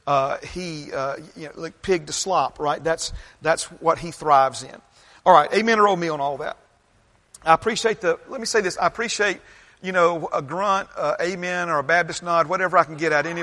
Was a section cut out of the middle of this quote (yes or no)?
no